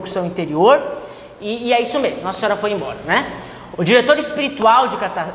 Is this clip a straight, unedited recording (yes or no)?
no